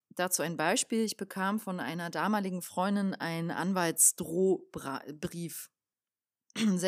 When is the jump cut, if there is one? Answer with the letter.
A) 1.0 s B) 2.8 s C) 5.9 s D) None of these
C